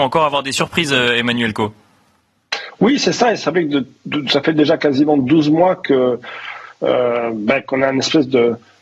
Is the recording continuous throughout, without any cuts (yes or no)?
yes